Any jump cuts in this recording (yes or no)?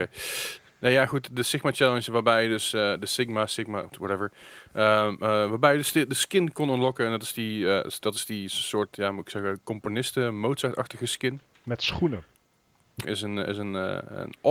yes